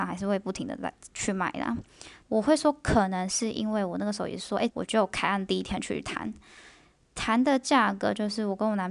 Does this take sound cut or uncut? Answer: cut